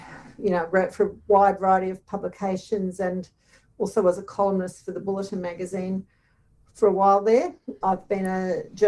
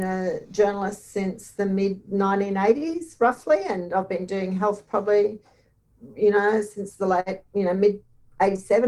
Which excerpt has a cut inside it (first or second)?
first